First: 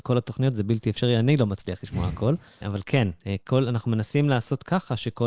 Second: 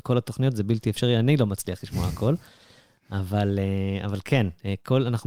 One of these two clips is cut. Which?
first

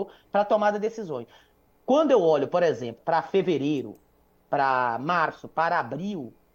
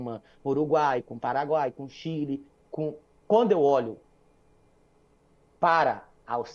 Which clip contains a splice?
first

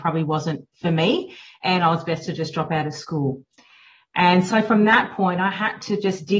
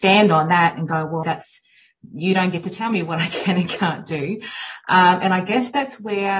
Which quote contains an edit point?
second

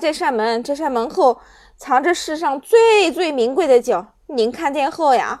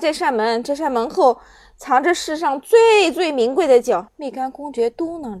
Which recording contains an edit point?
second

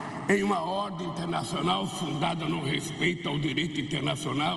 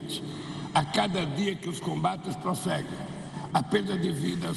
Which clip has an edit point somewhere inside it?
second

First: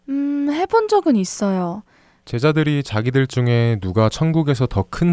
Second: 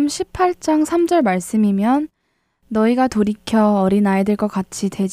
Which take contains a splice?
first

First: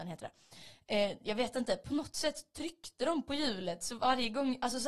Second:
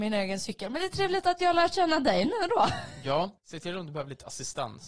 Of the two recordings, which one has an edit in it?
second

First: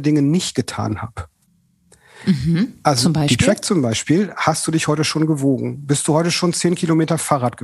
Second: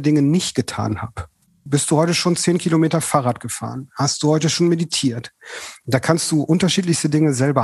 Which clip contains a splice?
second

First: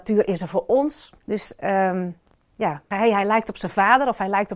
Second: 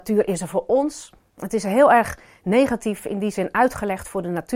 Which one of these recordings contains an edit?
first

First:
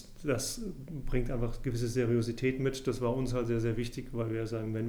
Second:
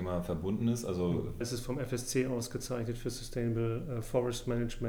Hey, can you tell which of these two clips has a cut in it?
second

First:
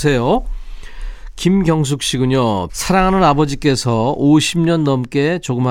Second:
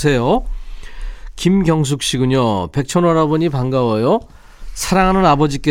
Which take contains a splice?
first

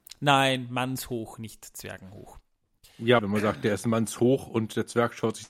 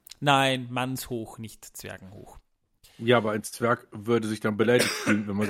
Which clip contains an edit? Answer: first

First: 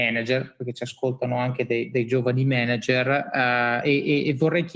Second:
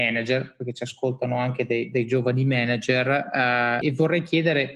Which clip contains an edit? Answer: second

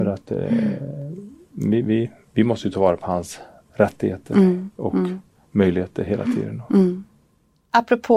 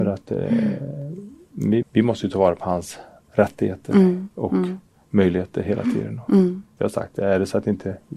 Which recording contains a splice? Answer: second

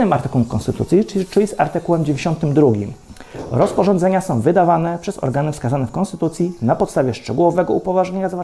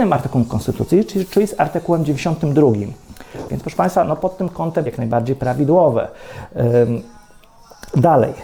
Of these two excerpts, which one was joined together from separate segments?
second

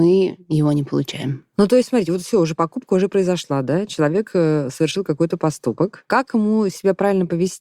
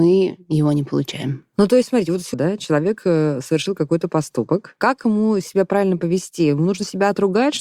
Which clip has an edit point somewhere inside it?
second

